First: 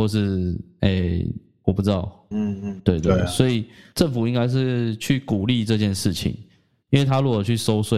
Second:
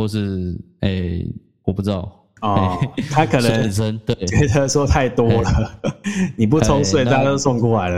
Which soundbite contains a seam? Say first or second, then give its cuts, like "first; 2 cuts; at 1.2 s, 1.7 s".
first; 1 cut; at 2.3 s